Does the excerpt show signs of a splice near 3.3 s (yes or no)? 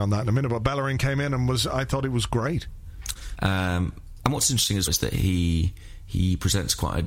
yes